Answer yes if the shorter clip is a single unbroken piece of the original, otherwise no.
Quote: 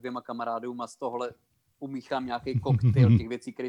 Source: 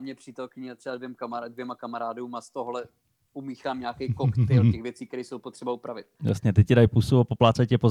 yes